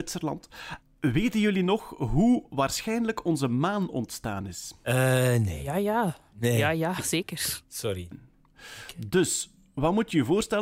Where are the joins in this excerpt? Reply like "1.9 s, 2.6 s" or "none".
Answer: 8.1 s